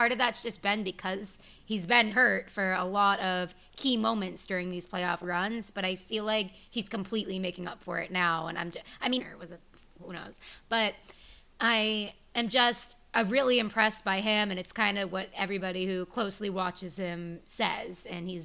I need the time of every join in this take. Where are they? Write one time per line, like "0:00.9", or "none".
0:02.1
0:09.2